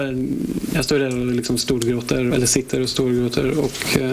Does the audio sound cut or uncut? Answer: cut